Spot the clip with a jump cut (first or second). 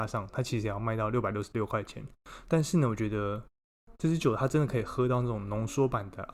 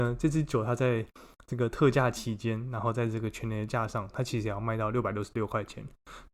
first